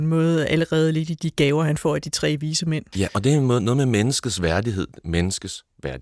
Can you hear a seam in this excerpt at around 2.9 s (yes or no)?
yes